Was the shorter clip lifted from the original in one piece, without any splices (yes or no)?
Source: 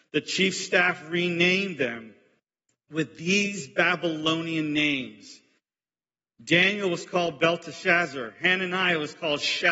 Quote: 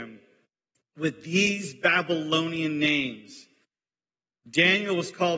yes